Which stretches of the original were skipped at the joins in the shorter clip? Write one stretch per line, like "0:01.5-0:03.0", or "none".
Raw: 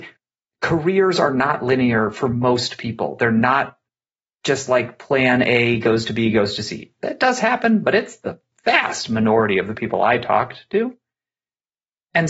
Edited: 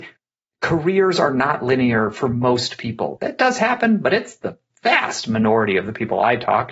0:03.2-0:07.0